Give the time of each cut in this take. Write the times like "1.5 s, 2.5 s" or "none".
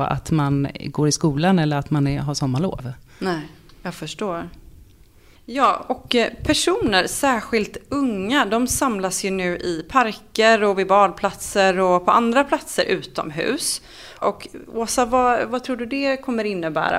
14.2 s